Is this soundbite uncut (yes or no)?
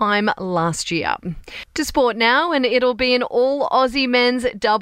yes